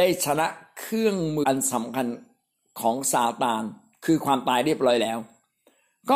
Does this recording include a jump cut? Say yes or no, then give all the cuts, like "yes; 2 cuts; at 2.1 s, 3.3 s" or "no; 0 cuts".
yes; 1 cut; at 1.4 s